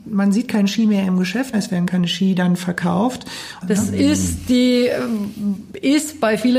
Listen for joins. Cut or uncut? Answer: cut